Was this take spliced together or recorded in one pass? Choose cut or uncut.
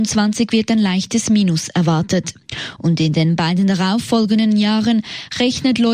uncut